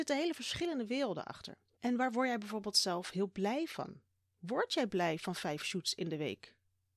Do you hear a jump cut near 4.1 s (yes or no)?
no